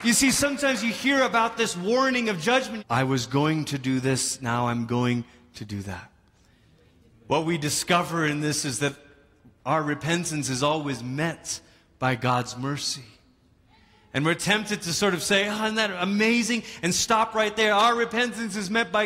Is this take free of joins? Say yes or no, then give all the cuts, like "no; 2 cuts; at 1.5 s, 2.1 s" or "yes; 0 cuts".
no; 1 cut; at 2.8 s